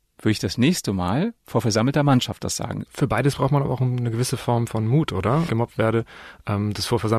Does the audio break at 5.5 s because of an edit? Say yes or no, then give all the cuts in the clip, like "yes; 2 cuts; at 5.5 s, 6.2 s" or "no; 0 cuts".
yes; 2 cuts; at 2.9 s, 5.5 s